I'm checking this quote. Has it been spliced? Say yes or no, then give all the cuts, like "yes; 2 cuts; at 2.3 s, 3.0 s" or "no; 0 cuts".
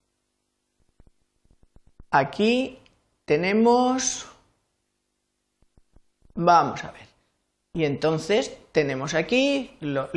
yes; 1 cut; at 7.6 s